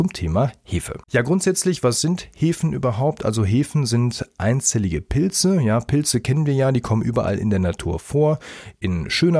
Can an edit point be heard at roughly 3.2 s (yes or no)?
no